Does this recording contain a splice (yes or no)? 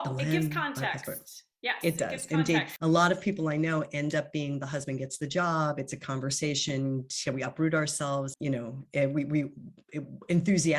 yes